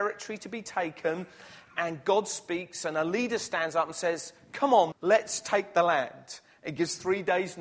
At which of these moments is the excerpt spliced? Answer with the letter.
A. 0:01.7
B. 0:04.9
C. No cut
B